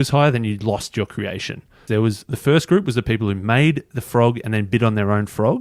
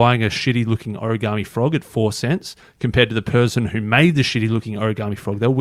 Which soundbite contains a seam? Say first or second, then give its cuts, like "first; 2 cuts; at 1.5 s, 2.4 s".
first; 1 cut; at 1.9 s